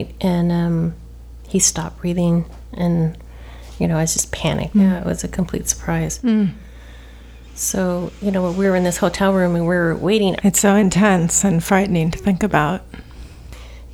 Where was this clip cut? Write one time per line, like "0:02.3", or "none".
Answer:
0:04.7
0:10.4